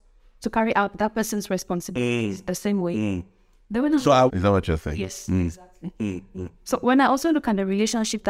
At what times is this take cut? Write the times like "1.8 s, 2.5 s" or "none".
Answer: 4.3 s